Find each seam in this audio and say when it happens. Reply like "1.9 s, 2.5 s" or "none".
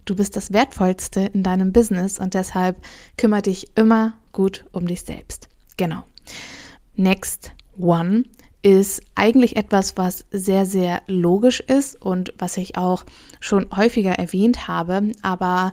6.8 s